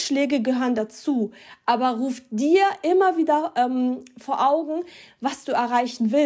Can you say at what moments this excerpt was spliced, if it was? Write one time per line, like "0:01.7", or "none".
none